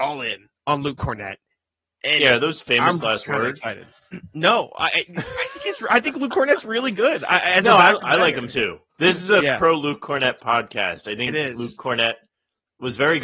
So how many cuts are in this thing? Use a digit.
1